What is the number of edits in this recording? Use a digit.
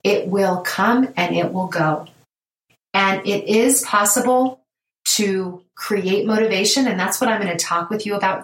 0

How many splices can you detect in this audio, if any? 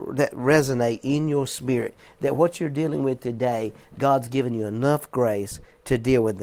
0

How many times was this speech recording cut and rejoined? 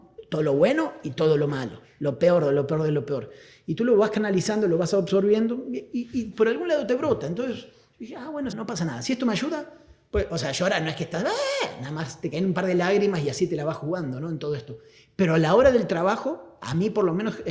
1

